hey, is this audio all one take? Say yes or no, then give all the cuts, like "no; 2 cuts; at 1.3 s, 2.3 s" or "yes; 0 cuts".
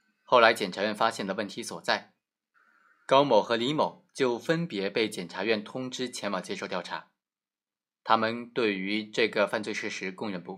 yes; 0 cuts